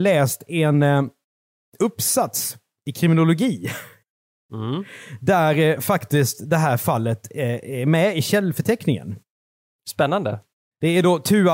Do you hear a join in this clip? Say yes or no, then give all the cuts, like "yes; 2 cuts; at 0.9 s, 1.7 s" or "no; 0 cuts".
no; 0 cuts